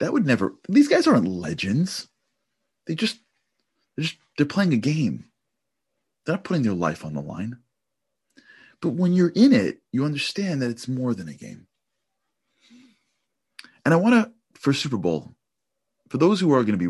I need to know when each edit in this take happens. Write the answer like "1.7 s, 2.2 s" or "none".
none